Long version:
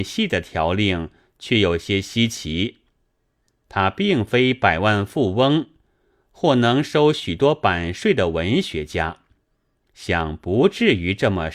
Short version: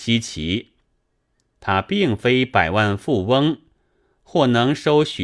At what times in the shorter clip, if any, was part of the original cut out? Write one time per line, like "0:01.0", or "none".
none

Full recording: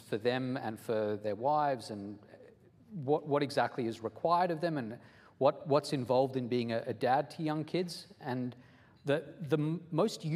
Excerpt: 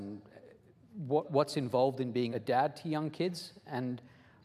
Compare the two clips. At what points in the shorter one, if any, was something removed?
0:01.2
0:02.3

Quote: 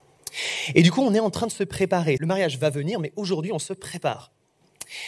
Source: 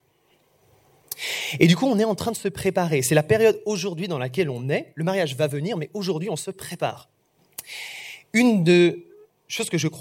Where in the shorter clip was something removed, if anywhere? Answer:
0:02.2

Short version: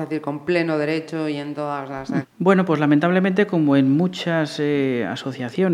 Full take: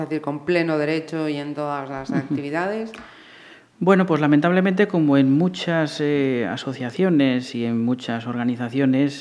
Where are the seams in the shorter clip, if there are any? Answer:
0:02.2

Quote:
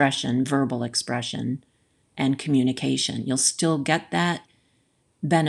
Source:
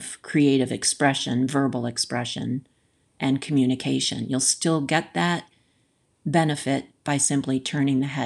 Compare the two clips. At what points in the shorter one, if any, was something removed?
none

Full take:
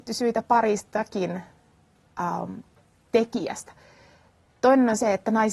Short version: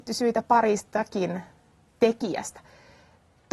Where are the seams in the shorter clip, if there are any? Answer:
0:01.9

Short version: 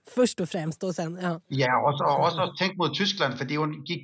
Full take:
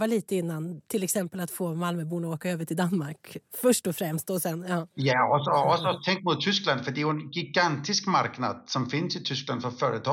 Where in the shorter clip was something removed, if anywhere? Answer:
none

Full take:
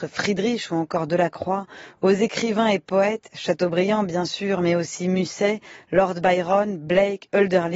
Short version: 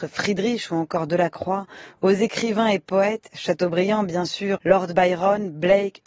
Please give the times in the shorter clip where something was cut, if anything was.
0:04.6

